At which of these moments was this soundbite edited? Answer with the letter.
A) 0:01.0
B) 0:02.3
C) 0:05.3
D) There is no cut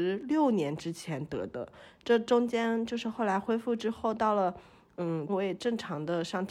C